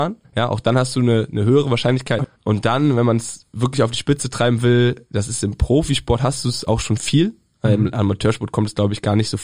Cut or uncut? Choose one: cut